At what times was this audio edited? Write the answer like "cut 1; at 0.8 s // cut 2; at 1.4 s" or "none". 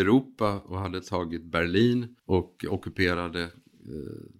cut 1; at 2.2 s